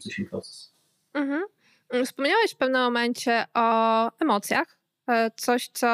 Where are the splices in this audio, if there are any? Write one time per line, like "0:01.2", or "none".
none